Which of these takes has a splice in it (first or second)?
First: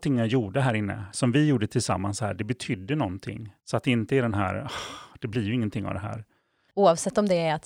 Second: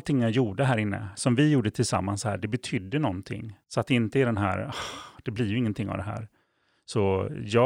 first